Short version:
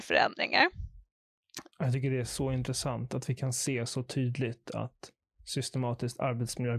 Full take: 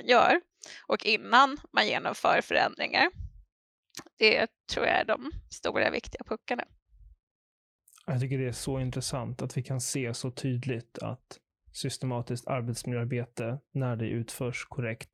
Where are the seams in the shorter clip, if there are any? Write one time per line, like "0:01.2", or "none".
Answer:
0:01.7